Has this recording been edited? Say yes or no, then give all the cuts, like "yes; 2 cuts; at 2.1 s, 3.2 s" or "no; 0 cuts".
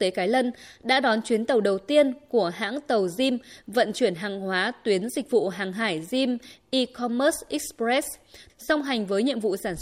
yes; 1 cut; at 8.5 s